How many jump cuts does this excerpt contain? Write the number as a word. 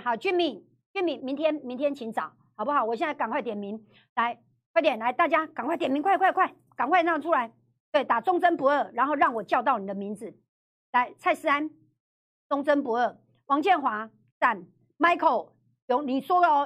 one